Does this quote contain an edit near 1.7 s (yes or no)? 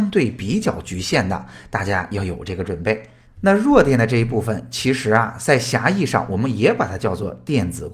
no